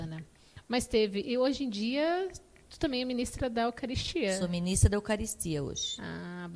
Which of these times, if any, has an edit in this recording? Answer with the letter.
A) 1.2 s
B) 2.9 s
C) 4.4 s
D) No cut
D